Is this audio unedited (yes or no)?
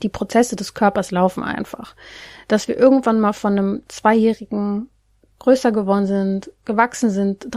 yes